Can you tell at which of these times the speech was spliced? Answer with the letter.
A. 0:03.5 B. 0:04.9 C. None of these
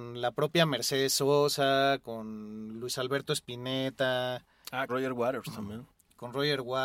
B